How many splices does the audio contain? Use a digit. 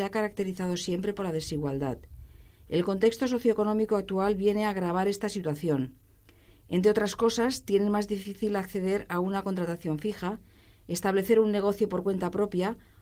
0